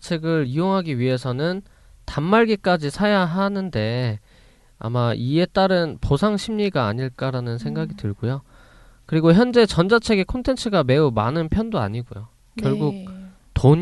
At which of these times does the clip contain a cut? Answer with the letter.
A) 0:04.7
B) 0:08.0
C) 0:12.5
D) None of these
D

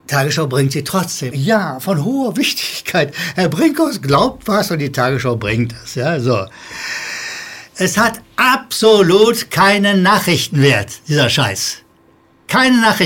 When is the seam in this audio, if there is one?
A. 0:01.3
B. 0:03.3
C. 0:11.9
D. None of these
A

